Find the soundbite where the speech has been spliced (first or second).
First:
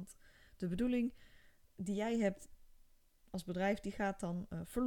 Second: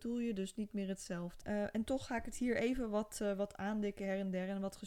second